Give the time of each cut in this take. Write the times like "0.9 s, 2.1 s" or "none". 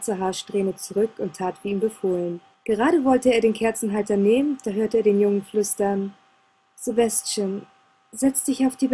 2.5 s